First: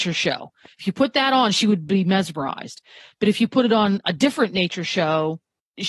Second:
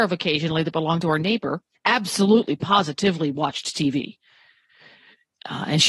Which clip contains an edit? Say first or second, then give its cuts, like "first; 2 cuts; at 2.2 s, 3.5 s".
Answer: second; 1 cut; at 1.7 s